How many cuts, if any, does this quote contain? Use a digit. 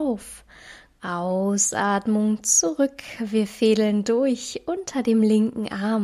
1